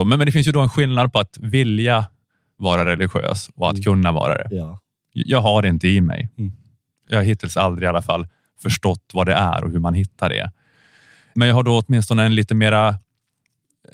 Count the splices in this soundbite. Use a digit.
0